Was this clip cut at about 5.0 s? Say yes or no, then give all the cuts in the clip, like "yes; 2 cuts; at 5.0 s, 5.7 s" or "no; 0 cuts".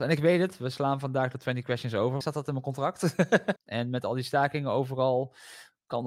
no; 2 cuts; at 2.2 s, 3.6 s